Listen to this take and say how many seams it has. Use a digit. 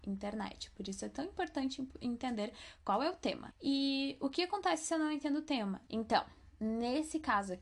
2